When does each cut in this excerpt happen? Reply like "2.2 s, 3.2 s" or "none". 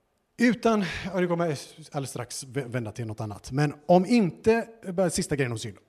none